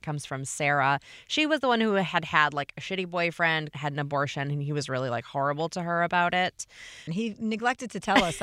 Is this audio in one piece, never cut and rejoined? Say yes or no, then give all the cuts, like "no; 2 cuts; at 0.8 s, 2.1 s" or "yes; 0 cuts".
no; 2 cuts; at 3.7 s, 7.1 s